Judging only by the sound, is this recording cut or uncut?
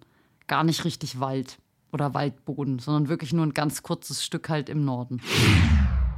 uncut